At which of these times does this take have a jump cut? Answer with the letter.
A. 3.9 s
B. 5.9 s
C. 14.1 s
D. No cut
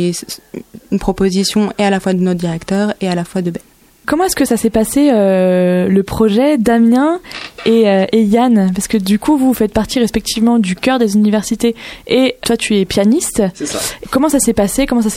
D